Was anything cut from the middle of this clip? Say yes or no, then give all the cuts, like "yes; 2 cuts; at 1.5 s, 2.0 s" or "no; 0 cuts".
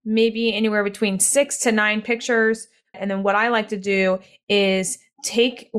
yes; 1 cut; at 2.9 s